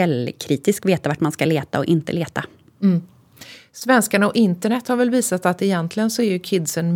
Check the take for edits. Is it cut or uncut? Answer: uncut